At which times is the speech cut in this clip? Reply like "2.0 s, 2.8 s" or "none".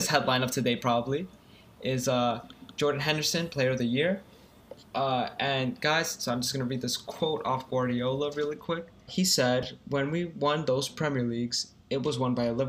9.1 s